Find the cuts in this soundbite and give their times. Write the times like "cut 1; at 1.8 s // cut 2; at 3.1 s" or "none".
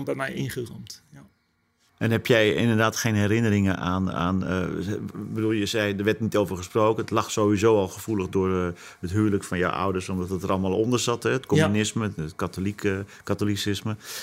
none